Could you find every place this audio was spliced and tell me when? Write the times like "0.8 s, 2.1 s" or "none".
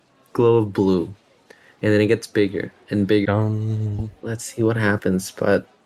3.2 s

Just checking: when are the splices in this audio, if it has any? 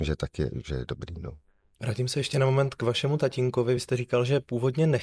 none

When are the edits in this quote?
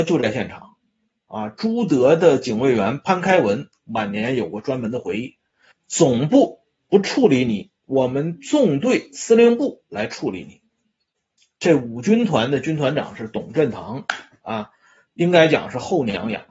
5.7 s, 15.1 s

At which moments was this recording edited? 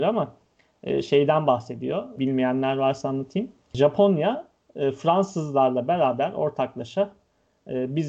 2.2 s

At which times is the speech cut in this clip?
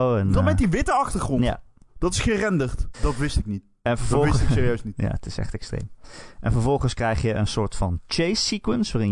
2.9 s

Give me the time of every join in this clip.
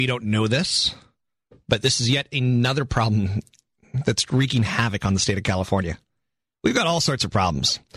4.3 s

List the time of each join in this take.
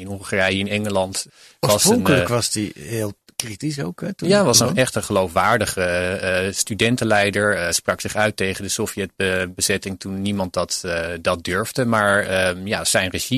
none

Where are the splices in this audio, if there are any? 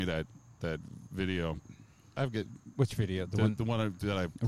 none

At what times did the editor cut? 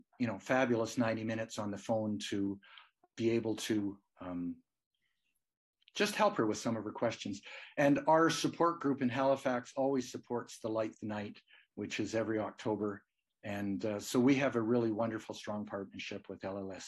3.1 s

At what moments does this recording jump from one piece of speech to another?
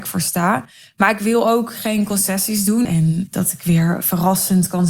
2.8 s

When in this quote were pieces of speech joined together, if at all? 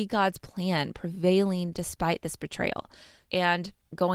3.2 s

